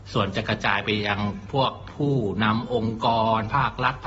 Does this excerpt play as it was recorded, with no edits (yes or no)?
yes